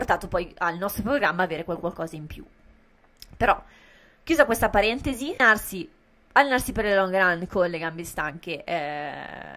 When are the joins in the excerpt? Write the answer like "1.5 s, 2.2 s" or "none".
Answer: none